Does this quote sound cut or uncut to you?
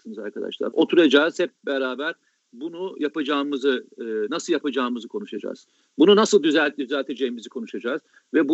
uncut